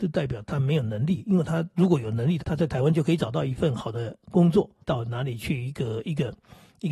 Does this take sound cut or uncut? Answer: cut